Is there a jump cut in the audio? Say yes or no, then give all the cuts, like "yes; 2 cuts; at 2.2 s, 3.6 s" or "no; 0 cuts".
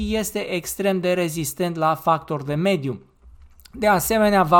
no; 0 cuts